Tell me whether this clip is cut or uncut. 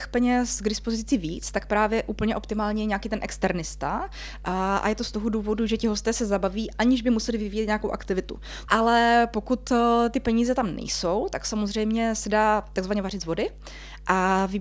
cut